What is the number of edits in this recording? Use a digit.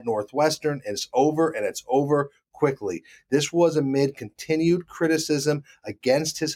1